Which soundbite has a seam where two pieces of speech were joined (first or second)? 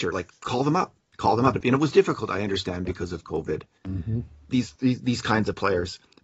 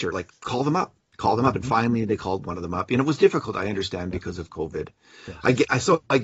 first